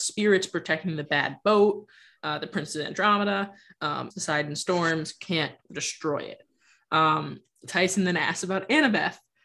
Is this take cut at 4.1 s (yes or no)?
yes